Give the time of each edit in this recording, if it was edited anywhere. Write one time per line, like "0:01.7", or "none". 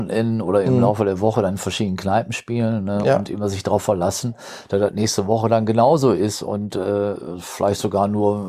none